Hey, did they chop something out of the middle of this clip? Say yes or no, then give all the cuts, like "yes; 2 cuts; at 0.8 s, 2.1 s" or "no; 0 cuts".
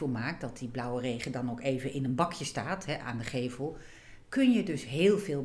no; 0 cuts